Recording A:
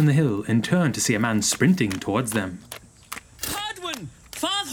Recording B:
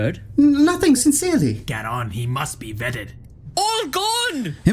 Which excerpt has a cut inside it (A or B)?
B